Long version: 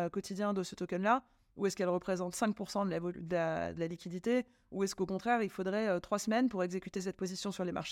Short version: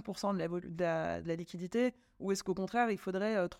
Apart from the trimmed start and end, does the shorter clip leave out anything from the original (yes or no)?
no